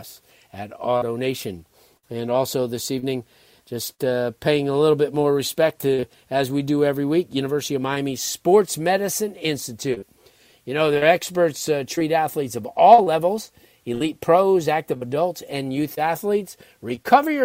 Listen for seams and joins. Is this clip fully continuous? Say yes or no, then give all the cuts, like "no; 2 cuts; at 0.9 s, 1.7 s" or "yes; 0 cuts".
yes; 0 cuts